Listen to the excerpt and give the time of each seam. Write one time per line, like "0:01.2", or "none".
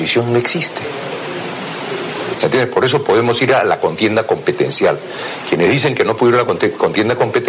0:02.3